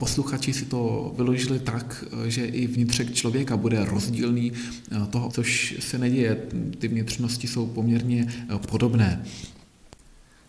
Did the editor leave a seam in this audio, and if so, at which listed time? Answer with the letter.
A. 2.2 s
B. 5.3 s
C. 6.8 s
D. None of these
B